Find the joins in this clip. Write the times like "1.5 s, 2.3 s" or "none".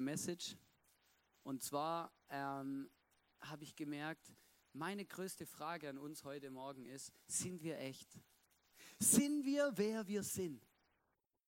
none